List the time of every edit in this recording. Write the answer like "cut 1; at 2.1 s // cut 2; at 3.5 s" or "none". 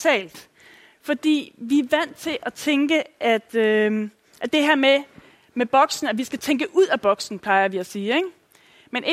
none